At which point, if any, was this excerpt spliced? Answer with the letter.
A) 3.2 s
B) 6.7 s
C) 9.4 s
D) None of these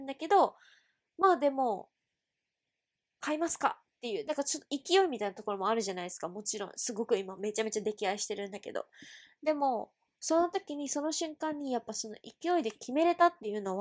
A